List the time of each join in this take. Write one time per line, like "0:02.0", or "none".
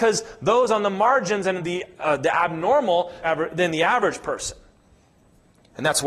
0:01.6
0:03.2